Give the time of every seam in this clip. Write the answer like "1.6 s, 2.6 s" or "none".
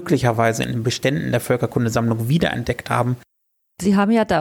none

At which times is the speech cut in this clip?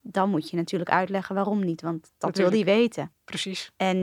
3.1 s

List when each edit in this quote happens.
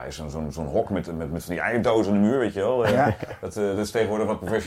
none

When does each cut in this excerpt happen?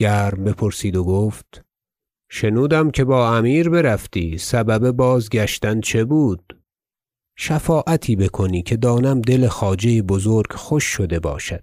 7.2 s

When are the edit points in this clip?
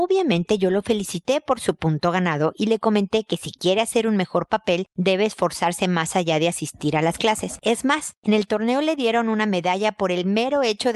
7.6 s

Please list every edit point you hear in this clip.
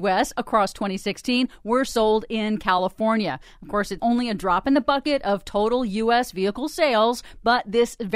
4.0 s

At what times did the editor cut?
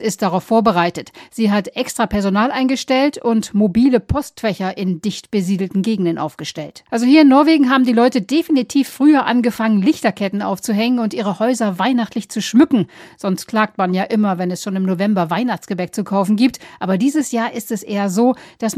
6.9 s

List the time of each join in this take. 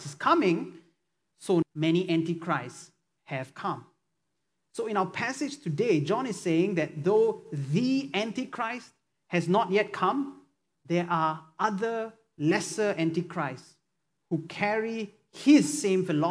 1.6 s

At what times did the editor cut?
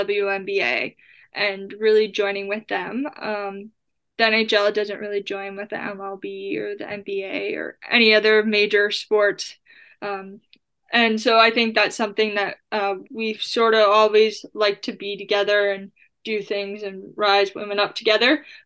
13.0 s

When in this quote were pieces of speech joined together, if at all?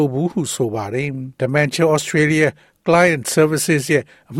1.4 s

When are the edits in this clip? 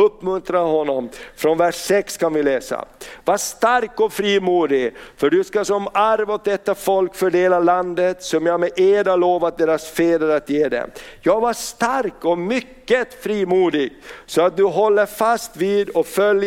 none

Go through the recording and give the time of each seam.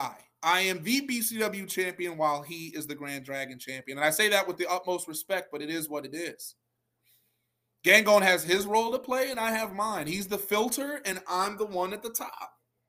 none

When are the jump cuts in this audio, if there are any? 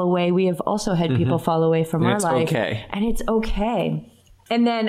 none

